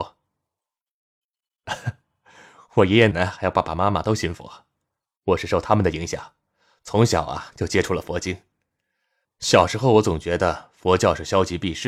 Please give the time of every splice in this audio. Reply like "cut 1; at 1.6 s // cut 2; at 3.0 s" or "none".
cut 1; at 3.1 s